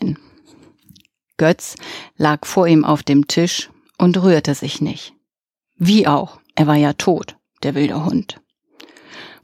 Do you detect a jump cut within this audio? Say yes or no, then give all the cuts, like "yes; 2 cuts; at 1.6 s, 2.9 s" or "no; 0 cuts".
no; 0 cuts